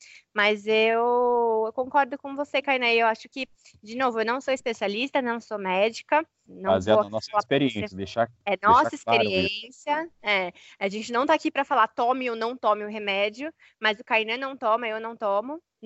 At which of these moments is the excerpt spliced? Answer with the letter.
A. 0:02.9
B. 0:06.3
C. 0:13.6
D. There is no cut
D